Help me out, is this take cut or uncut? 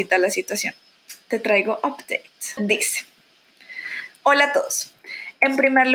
cut